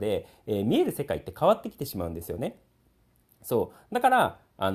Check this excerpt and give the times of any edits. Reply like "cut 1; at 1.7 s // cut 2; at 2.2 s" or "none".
none